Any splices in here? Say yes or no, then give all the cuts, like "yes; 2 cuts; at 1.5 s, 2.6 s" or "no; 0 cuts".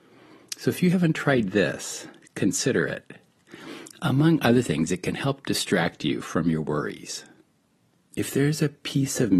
yes; 1 cut; at 8.0 s